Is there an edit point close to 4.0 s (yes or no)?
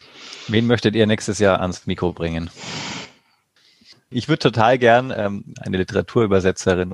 no